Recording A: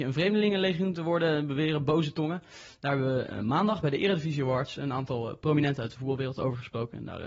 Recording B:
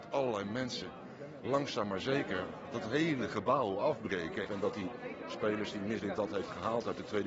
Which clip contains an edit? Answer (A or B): B